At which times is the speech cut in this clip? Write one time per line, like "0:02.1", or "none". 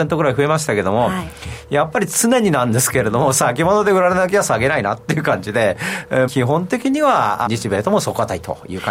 0:06.3
0:07.5